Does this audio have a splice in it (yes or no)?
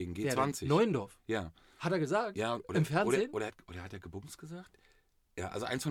yes